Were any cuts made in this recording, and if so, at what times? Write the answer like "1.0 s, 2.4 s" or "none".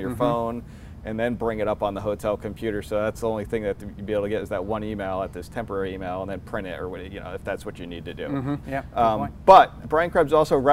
8.6 s, 9.8 s